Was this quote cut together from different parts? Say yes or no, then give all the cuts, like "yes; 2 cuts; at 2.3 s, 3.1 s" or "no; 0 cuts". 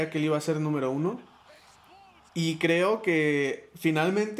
yes; 1 cut; at 2.3 s